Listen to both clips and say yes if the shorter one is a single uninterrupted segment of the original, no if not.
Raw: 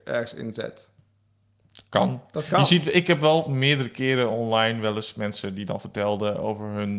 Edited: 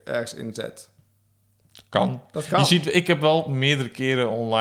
yes